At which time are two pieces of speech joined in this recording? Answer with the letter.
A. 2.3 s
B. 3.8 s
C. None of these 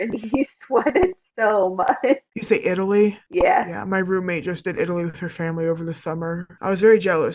A